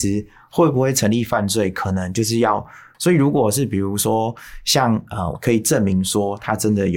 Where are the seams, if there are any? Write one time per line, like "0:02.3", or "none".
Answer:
0:02.9
0:05.3